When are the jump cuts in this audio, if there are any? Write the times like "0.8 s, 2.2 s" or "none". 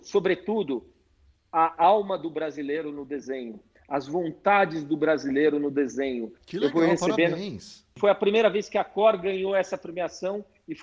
6.3 s